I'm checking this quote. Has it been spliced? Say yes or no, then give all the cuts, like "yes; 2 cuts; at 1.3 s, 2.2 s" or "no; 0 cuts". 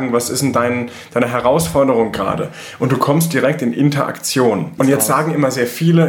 yes; 1 cut; at 4.8 s